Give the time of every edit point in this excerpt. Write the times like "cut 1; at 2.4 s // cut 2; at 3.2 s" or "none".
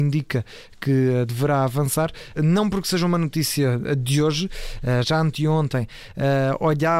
cut 1; at 2.4 s // cut 2; at 5.0 s